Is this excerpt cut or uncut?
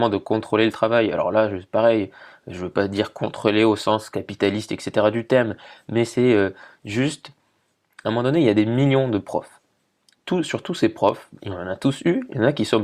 uncut